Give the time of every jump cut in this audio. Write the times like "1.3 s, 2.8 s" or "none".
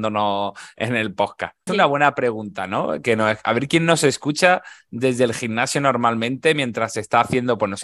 1.7 s